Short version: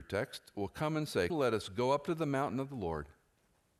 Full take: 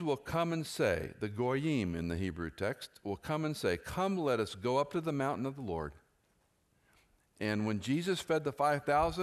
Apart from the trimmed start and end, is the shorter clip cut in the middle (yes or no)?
yes